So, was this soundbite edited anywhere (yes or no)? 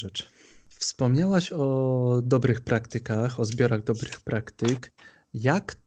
no